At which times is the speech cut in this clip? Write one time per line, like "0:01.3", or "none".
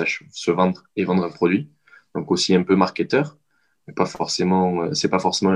none